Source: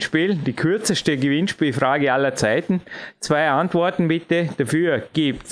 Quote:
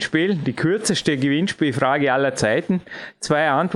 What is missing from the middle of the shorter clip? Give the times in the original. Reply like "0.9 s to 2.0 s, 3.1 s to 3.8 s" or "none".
none